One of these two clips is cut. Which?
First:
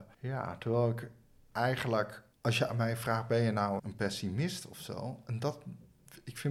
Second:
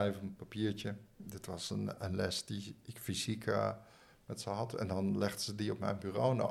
first; 2 cuts; at 2.3 s, 3.8 s

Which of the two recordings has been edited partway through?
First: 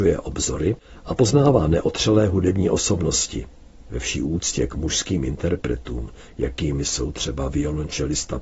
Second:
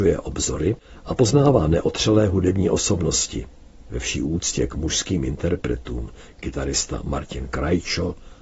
second; 1 cut; at 6.3 s

